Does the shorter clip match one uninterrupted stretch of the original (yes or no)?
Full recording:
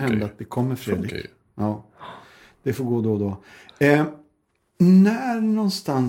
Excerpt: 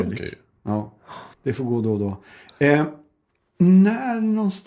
no